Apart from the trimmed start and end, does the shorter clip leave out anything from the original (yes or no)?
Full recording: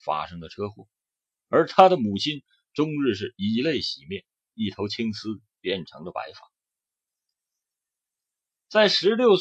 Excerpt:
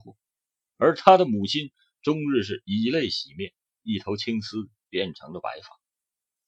no